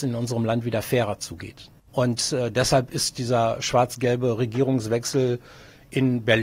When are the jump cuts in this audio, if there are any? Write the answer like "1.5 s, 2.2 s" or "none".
1.9 s